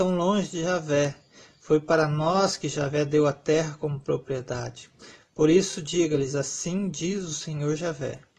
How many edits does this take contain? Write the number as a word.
zero